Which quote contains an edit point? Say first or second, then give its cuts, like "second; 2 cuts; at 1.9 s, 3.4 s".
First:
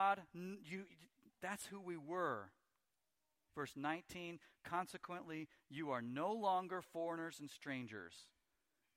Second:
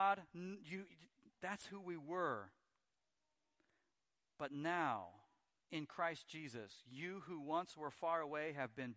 first; 1 cut; at 3.5 s